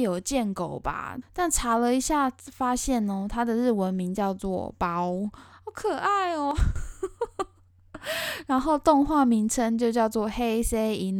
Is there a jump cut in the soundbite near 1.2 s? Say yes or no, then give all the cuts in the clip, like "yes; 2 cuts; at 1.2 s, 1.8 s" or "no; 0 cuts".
yes; 1 cut; at 1.2 s